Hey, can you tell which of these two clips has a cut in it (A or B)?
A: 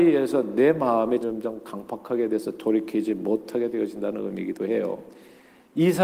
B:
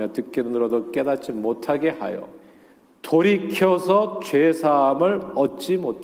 A